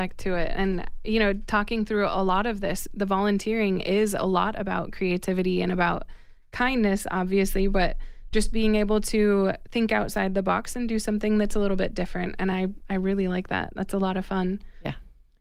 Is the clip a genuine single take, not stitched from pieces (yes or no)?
yes